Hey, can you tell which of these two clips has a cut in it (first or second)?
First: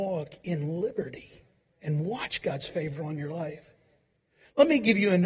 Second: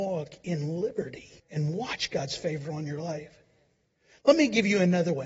second